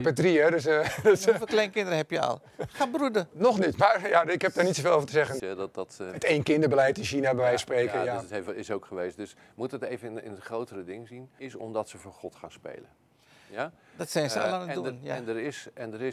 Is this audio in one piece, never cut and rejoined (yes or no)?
no